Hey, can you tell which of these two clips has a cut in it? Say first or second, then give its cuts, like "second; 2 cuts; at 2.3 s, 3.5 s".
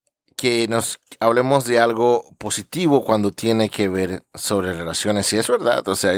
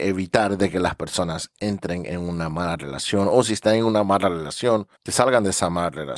second; 1 cut; at 5.0 s